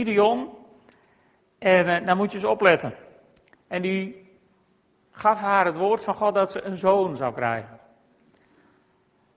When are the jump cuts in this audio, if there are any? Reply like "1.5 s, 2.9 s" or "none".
3.5 s